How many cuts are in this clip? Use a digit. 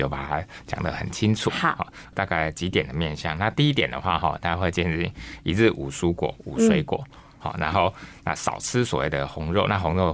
1